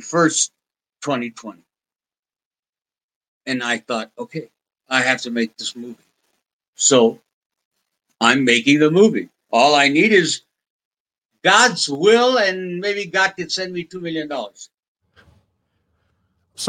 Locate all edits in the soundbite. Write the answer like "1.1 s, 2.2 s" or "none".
none